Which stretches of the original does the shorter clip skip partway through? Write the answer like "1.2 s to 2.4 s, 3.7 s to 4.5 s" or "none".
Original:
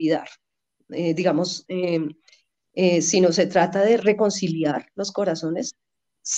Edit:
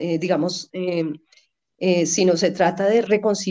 none